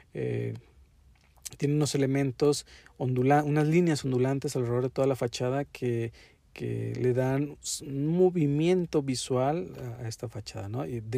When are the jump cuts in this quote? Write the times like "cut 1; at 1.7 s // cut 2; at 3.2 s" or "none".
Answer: none